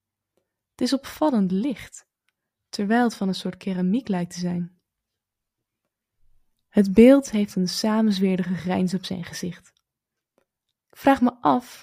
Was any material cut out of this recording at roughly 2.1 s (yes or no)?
no